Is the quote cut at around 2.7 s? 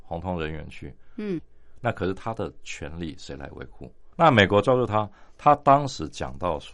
no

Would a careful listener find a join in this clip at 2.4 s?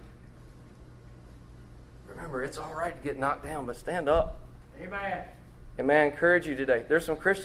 no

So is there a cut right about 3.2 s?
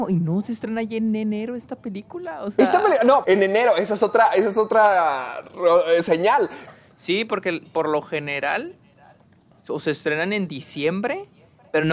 yes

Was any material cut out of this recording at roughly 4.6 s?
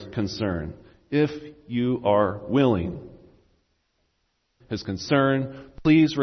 yes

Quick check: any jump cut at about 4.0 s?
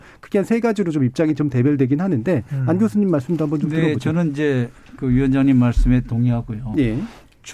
no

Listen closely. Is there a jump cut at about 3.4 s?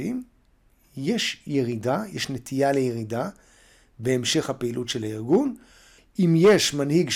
no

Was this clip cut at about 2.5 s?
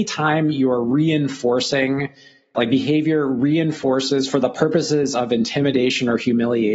yes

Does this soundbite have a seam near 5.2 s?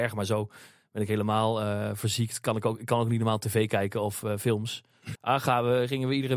yes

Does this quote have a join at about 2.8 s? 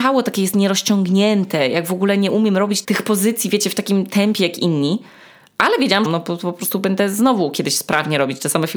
yes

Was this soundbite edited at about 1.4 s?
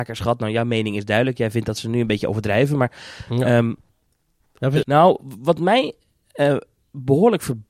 no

